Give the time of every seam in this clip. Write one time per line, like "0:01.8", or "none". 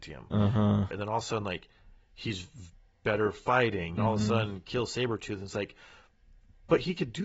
0:00.9
0:04.0